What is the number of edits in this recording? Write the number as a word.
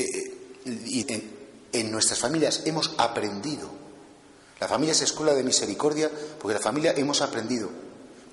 one